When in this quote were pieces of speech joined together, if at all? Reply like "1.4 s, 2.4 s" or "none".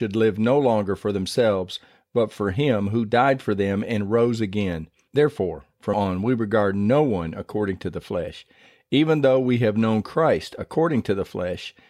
5.9 s